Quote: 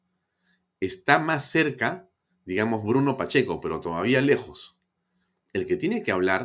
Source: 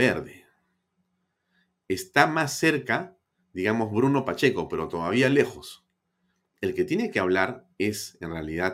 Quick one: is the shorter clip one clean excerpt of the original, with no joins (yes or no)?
yes